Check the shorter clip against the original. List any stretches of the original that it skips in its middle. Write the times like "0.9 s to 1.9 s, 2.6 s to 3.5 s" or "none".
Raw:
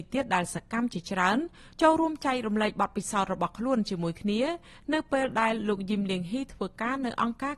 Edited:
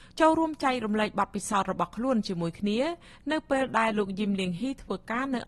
5.5 s to 5.6 s